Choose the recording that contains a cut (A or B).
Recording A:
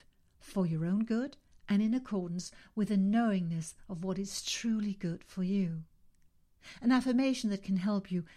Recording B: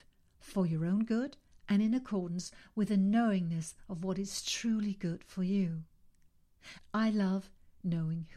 B